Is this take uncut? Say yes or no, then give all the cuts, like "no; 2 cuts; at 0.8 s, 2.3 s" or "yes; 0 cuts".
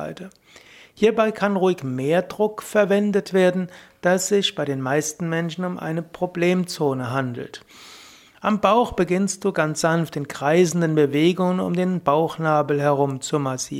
no; 1 cut; at 8.3 s